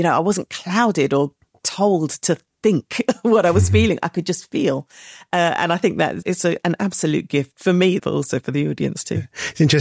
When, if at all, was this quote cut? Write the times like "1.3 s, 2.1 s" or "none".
6.2 s, 8.0 s